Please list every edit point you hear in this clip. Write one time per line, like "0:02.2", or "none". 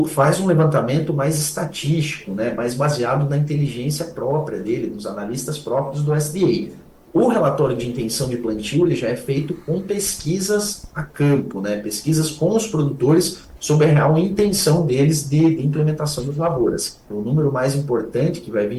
0:17.1

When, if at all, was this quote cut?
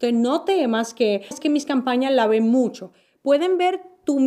0:01.3

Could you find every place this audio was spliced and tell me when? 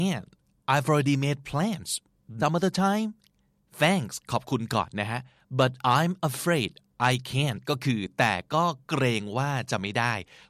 0:02.4

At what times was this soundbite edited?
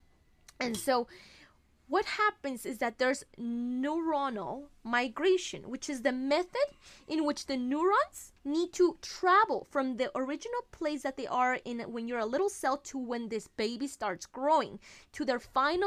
0:08.4
0:11.6

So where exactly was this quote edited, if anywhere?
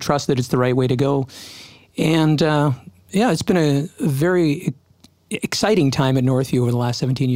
none

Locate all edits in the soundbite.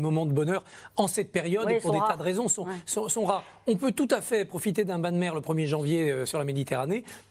none

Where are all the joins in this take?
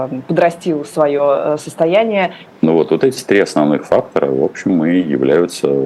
0:02.5

